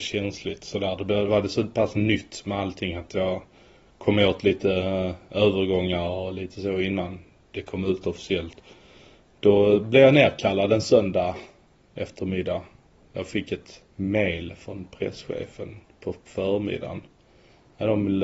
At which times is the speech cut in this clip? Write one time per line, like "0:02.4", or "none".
0:13.9